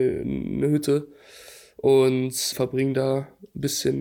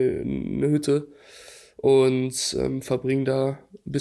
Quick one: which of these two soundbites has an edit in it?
first; 1 cut; at 2.5 s

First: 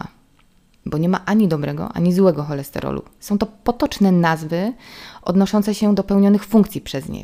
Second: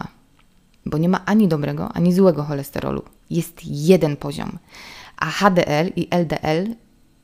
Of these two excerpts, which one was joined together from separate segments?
first; 1 cut; at 3.2 s

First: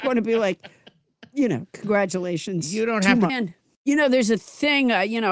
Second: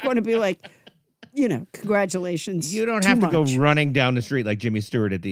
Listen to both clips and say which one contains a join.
first; 1 cut; at 3.3 s

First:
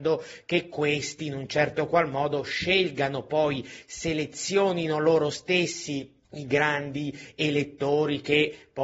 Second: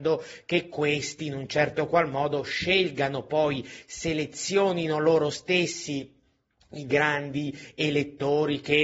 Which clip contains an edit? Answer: first; 1 cut; at 6.2 s

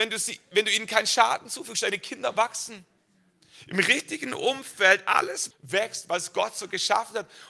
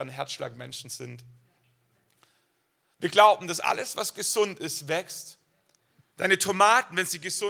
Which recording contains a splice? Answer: first; 1 cut; at 5.5 s

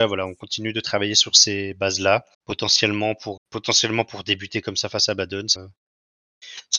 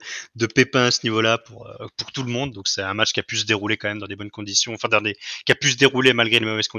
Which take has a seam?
first; 3 cuts; at 2.3 s, 3.4 s, 5.6 s

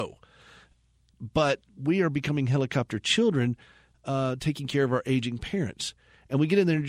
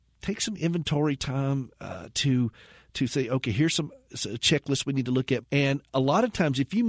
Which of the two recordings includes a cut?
second; 1 cut; at 5.4 s

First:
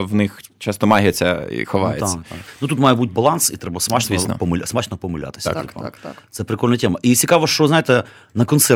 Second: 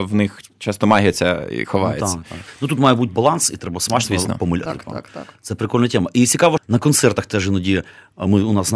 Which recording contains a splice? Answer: second; 2 cuts; at 4.7 s, 6.6 s

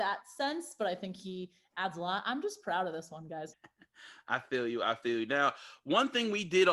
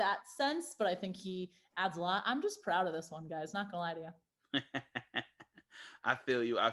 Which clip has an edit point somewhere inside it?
first; 1 cut; at 3.5 s

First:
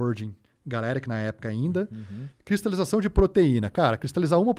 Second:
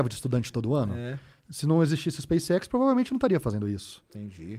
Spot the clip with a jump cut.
first; 1 cut; at 2.3 s

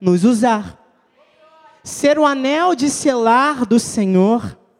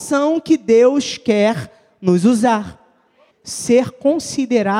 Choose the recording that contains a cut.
second; 1 cut; at 3.3 s

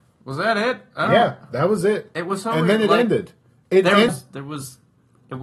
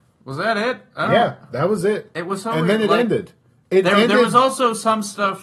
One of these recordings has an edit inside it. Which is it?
first; 1 cut; at 4.1 s

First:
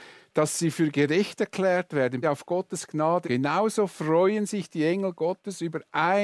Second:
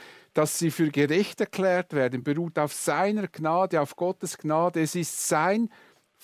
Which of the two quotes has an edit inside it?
first; 2 cuts; at 2.2 s, 3.2 s

